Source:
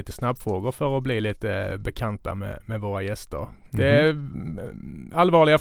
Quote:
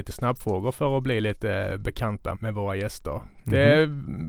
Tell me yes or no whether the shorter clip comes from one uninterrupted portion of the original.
no